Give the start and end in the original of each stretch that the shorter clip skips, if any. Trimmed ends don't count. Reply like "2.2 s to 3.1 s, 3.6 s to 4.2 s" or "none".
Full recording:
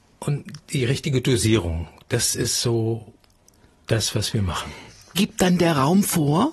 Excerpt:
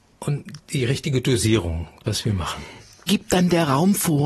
2.0 s to 4.1 s